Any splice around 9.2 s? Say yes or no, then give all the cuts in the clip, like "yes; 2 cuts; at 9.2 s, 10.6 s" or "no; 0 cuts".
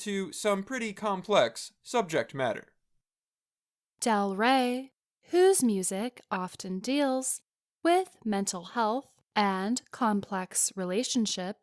yes; 1 cut; at 9.2 s